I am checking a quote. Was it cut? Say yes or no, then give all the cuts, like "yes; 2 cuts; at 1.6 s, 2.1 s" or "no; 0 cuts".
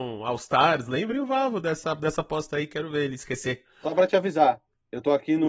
no; 0 cuts